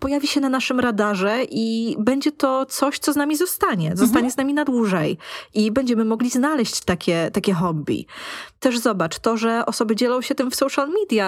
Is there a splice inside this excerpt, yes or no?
no